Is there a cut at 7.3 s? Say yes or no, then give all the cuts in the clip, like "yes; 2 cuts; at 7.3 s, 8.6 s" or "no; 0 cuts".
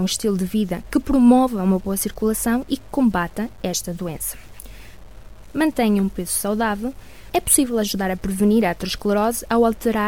yes; 2 cuts; at 5.4 s, 7.3 s